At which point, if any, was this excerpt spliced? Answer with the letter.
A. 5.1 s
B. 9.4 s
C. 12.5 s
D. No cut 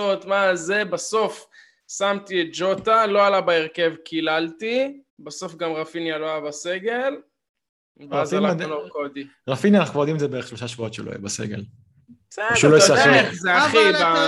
A